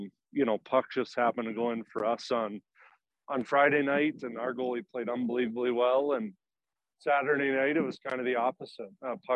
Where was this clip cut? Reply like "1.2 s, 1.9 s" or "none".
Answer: none